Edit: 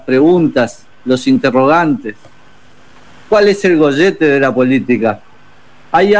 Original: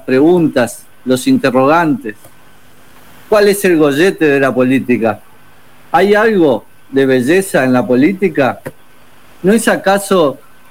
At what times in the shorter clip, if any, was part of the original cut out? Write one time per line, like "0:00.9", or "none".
none